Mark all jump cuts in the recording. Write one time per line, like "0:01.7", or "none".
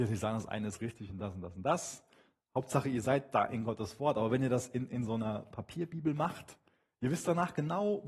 none